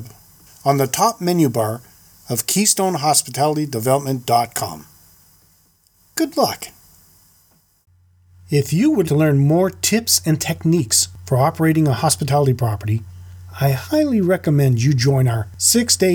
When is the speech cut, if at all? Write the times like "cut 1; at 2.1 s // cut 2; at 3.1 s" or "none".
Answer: cut 1; at 9.0 s